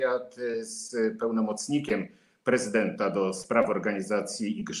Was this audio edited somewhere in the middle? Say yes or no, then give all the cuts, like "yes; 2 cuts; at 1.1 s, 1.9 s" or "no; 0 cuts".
no; 0 cuts